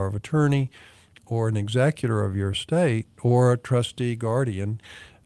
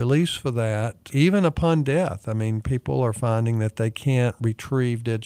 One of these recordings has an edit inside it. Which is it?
second; 1 cut; at 1.1 s

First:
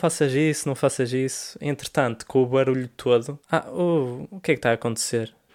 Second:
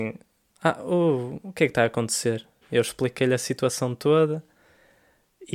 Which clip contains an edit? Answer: first; 1 cut; at 3.4 s

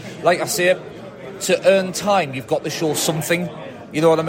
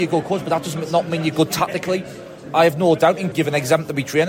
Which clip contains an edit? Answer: second; 1 cut; at 3.3 s

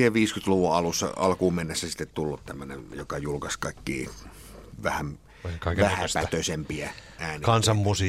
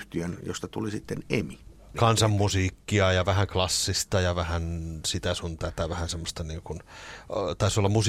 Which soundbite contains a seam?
second; 1 cut; at 1.9 s

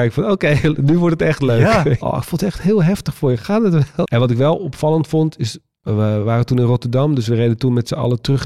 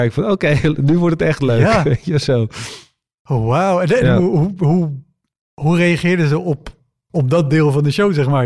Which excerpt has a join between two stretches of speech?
first; 2 cuts; at 2.0 s, 4.0 s

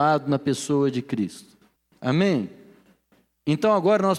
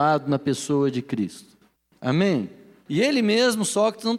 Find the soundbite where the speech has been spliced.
second; 1 cut; at 2.9 s

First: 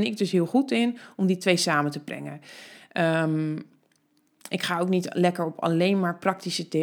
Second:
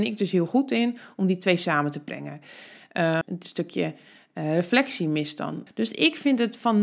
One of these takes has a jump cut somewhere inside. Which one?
second; 2 cuts; at 3.2 s, 5.7 s

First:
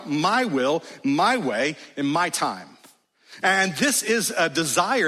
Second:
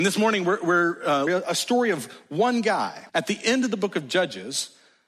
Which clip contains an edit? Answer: second; 2 cuts; at 1.3 s, 3.1 s

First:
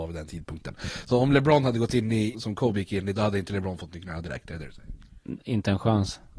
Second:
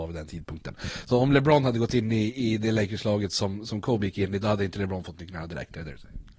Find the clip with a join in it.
first; 1 cut; at 2.3 s

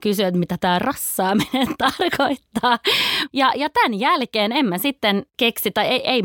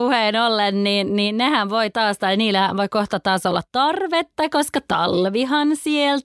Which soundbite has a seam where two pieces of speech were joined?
first; 1 cut; at 3.3 s

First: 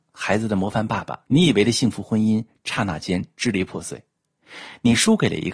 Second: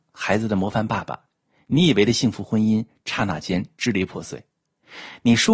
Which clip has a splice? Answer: first; 1 cut; at 1.2 s

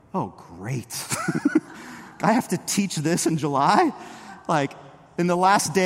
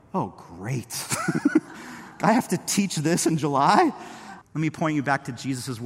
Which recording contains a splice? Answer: second; 1 cut; at 4.4 s

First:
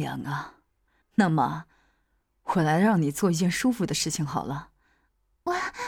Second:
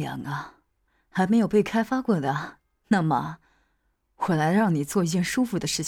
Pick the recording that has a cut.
first; 1 cut; at 1.0 s

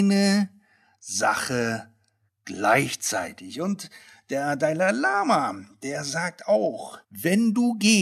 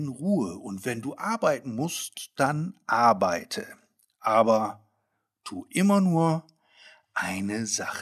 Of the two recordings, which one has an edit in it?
first; 1 cut; at 7.0 s

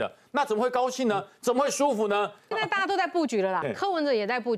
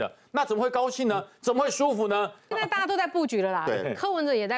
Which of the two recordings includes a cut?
first; 1 cut; at 3.6 s

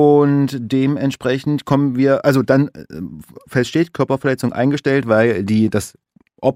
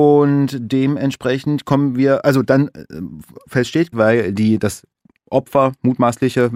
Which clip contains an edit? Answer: second; 1 cut; at 3.9 s

